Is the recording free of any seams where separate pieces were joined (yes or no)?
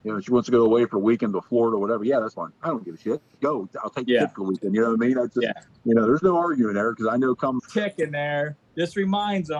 no